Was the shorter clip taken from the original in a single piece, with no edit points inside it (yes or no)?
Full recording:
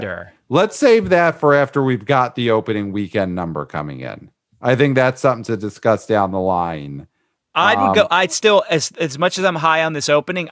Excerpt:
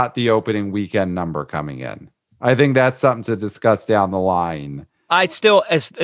no